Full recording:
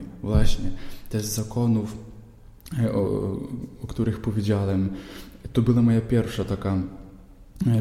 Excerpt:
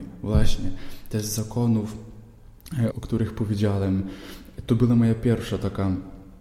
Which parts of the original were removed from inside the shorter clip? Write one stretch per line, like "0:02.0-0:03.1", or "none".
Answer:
0:02.9-0:03.8

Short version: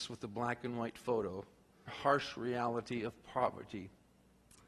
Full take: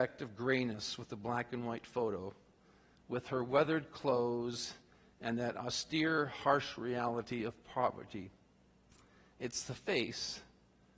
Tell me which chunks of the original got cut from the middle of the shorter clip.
0:02.8-0:06.3

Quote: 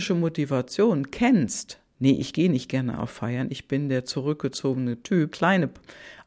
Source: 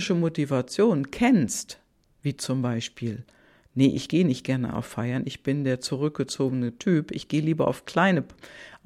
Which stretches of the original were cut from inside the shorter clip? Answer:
0:01.9-0:03.7
0:07.1-0:07.8

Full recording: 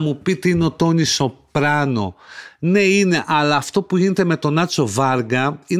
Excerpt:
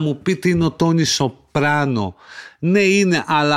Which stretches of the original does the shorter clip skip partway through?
none

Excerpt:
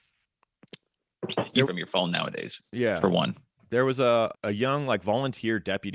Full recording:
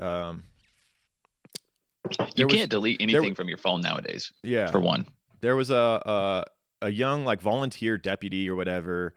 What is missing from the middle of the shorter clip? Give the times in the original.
0:02.5-0:03.4
0:06.0-0:06.7

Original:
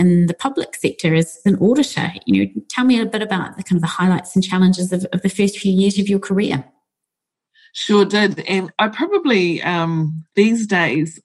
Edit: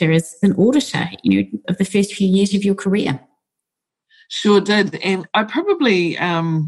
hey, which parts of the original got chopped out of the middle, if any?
0:02.7-0:05.1

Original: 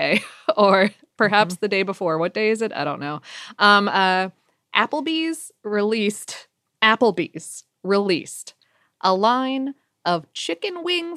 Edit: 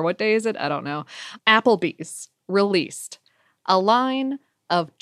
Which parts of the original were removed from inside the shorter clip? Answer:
0:03.5-0:06.7

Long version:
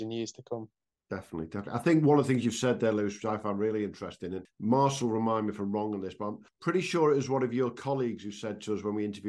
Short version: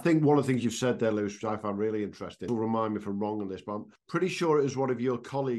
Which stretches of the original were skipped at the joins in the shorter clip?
0:04.3-0:05.0

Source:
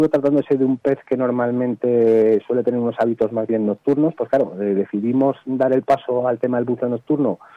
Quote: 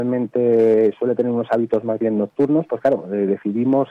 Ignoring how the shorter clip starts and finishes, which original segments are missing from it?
none

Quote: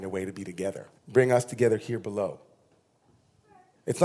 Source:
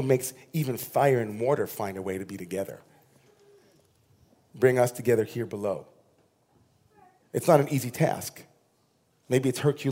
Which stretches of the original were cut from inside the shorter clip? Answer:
0:02.9-0:04.4

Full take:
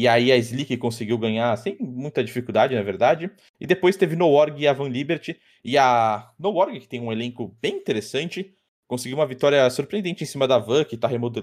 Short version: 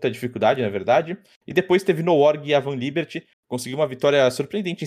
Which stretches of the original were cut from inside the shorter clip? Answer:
0:05.5-0:08.7

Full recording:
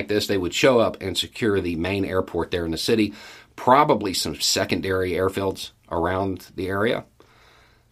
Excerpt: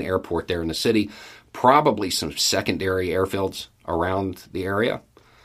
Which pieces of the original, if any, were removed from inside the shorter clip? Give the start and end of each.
none

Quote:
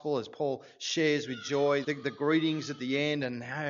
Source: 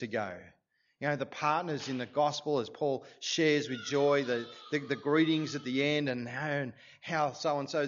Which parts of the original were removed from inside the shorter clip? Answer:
0:04.3-0:04.7

